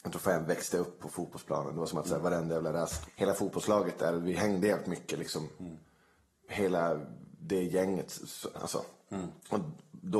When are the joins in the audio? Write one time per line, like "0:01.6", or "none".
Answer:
0:03.1
0:08.5